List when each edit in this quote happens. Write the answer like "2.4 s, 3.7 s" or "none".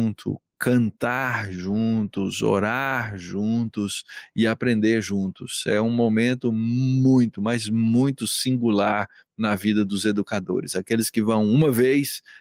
none